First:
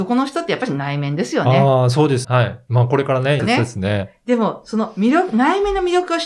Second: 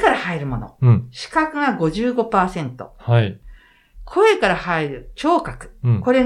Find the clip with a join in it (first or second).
first